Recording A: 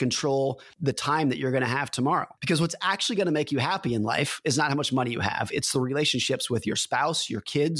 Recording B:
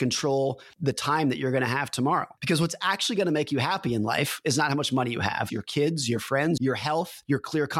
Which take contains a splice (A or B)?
B